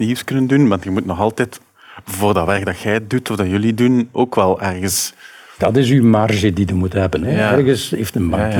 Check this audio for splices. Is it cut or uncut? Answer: uncut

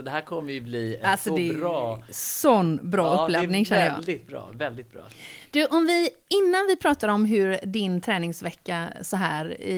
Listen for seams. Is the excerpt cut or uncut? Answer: uncut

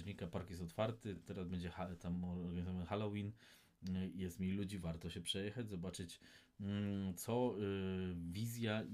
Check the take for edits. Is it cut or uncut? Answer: uncut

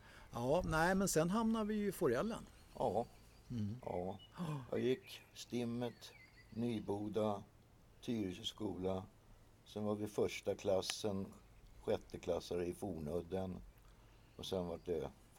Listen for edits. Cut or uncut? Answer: cut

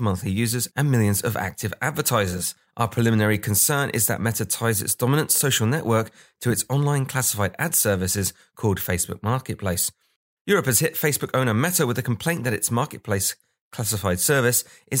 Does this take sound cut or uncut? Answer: cut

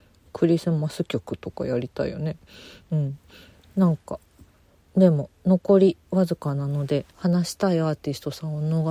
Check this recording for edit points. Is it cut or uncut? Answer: cut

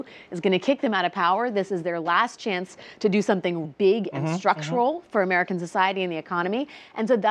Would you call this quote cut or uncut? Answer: cut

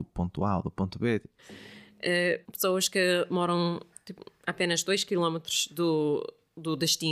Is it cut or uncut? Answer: cut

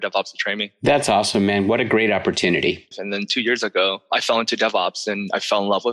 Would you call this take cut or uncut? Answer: cut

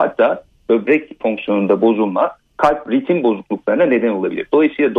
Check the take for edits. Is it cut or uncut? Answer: uncut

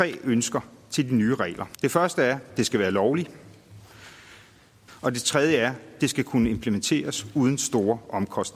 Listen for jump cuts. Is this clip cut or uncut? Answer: cut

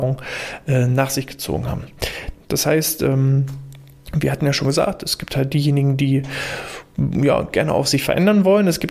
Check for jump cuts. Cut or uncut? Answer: cut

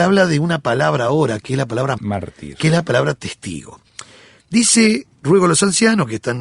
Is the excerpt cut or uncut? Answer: cut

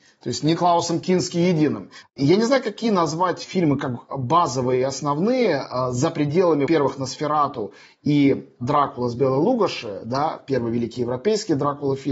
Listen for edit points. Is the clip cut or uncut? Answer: cut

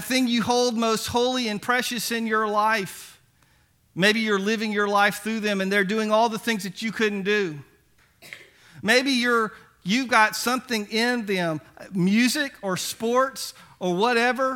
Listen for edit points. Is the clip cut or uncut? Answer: uncut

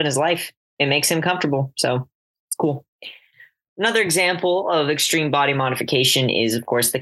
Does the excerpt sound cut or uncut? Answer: uncut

